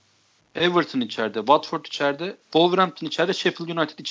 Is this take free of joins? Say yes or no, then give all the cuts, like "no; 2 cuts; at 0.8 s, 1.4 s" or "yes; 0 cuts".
no; 1 cut; at 2.4 s